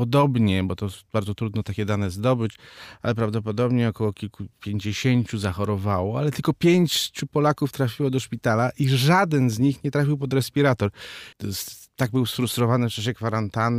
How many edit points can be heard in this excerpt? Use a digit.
1